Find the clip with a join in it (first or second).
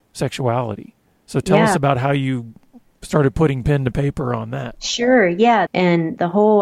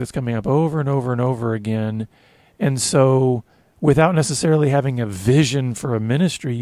first